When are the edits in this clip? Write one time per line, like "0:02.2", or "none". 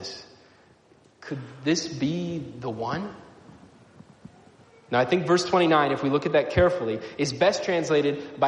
none